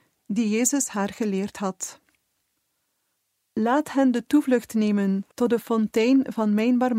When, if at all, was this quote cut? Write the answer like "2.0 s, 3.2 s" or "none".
3.4 s, 5.3 s